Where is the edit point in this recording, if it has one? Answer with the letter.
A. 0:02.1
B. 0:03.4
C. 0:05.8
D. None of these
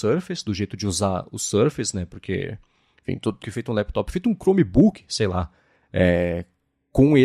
B